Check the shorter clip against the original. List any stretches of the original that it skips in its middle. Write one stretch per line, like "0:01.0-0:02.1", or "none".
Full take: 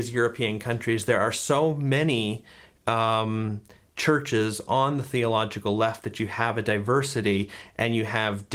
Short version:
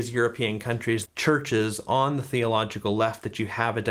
0:01.1-0:03.9

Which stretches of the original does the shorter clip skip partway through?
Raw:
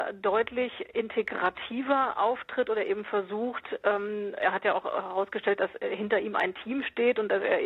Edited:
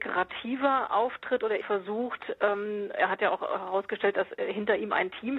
0:02.9-0:03.0

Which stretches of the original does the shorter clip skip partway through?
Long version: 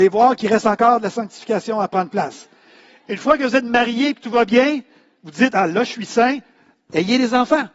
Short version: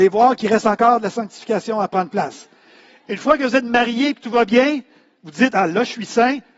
none

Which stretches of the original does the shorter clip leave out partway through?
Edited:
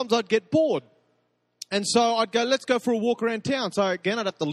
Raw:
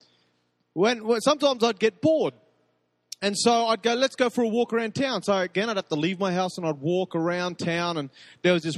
none

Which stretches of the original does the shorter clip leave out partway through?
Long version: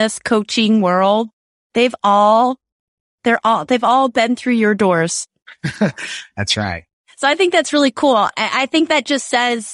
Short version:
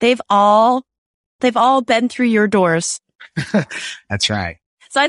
0:03.1-0:03.7

